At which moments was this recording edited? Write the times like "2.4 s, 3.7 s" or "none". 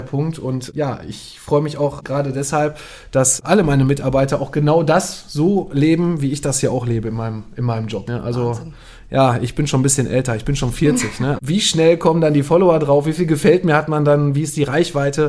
8.1 s, 11.4 s